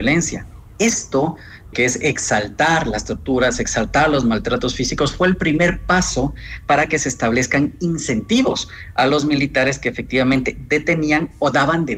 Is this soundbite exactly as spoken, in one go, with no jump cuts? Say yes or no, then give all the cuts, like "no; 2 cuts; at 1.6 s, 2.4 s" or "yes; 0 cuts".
no; 1 cut; at 1.7 s